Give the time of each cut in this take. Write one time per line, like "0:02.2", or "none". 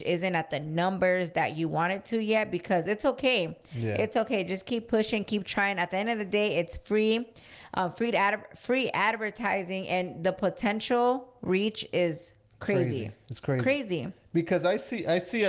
none

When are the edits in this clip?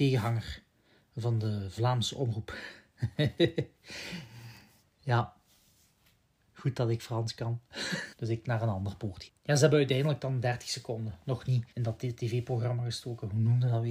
0:08.1
0:09.3
0:11.7

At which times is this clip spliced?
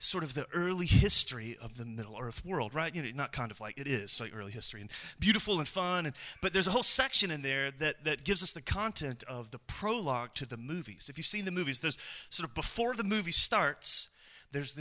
none

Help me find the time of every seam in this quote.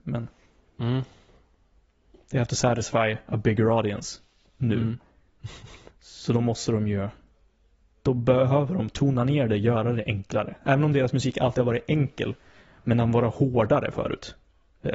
none

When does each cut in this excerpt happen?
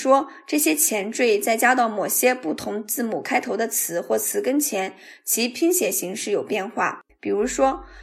0:07.1

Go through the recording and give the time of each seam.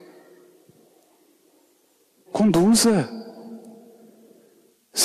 0:02.3

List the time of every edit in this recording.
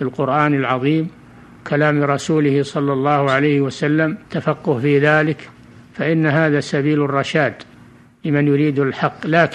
0:04.2

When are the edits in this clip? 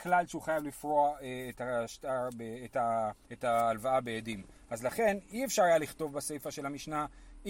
0:03.2

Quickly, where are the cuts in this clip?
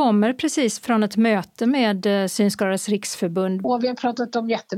0:03.6

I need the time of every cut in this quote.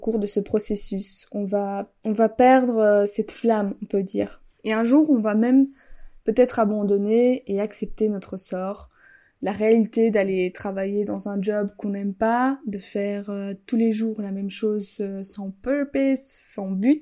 none

